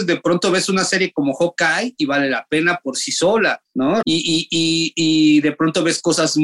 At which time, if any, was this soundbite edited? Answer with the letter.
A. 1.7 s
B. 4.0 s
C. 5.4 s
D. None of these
B